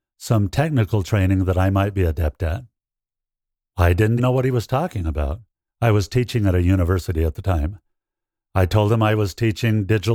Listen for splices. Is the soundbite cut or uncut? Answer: cut